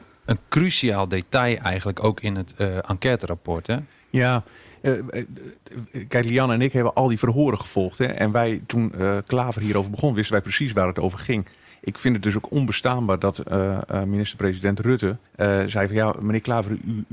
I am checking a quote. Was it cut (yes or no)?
yes